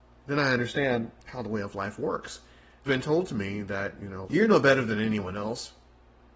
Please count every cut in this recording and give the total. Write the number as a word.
three